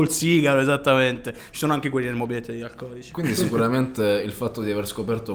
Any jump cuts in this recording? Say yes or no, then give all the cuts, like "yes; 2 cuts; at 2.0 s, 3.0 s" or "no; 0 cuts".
no; 0 cuts